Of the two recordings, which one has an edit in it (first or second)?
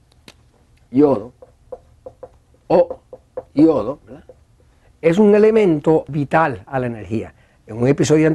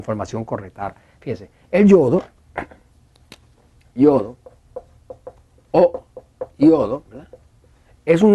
first